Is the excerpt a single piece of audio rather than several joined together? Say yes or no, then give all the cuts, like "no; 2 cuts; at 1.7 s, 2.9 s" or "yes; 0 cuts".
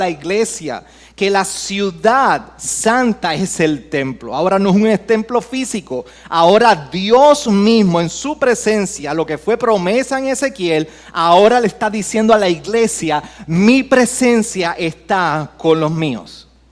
yes; 0 cuts